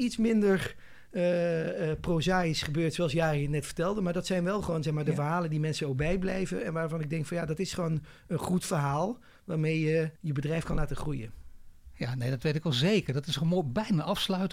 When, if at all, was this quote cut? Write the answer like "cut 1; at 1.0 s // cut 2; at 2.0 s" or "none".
cut 1; at 10.2 s